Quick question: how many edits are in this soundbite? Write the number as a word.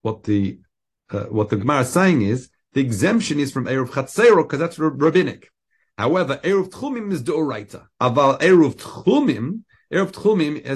one